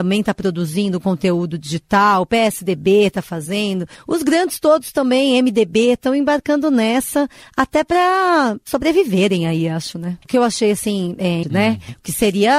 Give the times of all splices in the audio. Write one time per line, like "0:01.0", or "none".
0:10.2
0:11.4